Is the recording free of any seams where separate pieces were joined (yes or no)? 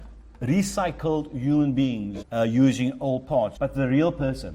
no